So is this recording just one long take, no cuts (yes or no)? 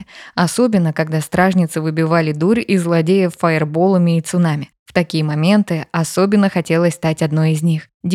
yes